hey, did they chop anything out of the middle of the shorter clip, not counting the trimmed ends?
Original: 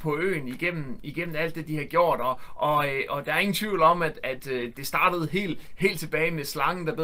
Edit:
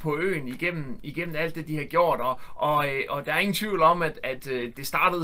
no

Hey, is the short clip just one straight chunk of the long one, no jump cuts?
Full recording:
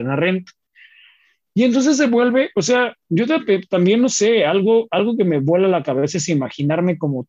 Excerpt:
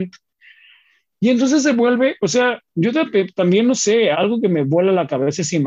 no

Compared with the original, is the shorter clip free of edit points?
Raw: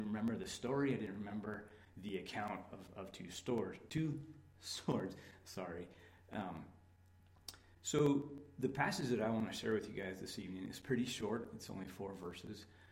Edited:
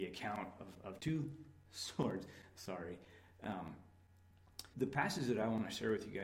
no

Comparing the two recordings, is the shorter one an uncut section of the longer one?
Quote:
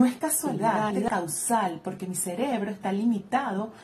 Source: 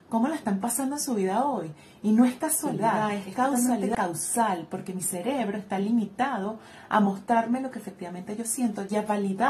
no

